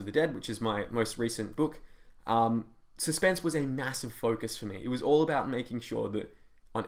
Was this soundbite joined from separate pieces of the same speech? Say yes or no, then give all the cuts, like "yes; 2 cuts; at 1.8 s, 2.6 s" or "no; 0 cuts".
no; 0 cuts